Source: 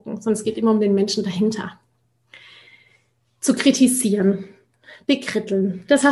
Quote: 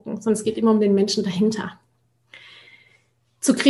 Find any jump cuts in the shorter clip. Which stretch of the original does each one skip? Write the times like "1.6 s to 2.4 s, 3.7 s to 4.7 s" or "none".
none